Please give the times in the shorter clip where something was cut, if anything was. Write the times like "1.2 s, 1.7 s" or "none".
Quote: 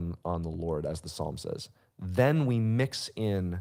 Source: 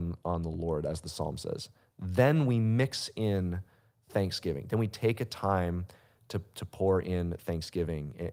none